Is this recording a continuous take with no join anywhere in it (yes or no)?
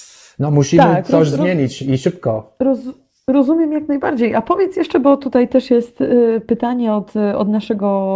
yes